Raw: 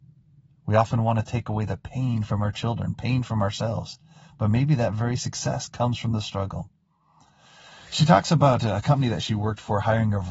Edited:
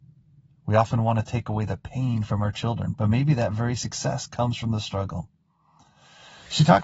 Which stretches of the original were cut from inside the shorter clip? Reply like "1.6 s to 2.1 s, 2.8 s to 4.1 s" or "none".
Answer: 3.0 s to 4.4 s